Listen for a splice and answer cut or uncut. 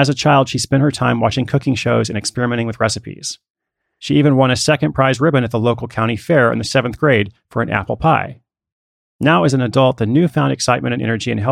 uncut